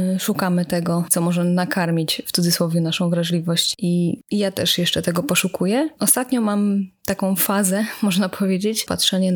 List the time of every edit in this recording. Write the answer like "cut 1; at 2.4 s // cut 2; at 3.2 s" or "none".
none